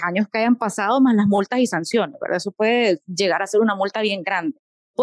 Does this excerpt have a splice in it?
no; 0 cuts

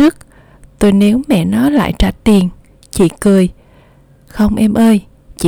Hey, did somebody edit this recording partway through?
no; 0 cuts

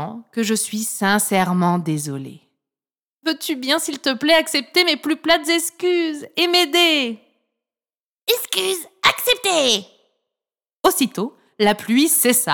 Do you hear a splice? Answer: no; 0 cuts

